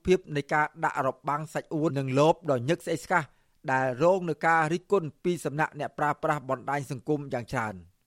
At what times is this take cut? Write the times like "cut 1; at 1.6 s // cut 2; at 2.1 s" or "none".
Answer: cut 1; at 1.9 s